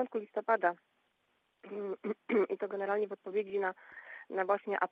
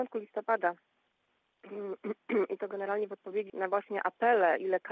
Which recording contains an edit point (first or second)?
second